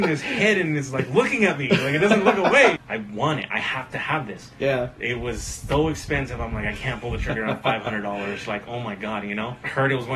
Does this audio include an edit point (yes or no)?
yes